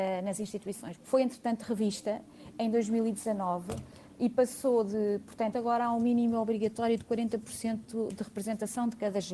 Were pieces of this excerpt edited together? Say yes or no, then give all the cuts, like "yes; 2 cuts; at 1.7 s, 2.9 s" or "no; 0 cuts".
yes; 2 cuts; at 1.0 s, 5.5 s